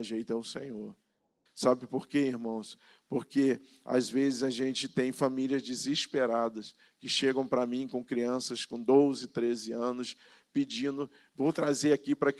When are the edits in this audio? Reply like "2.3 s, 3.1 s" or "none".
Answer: 1.5 s